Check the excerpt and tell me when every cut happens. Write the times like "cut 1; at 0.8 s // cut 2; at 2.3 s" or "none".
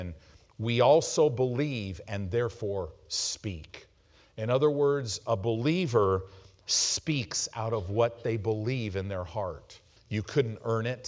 cut 1; at 10.0 s